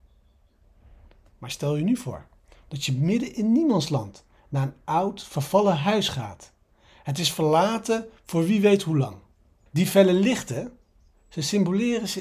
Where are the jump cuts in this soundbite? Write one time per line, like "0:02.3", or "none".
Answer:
0:09.7